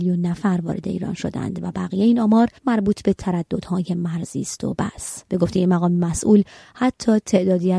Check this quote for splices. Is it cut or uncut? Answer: cut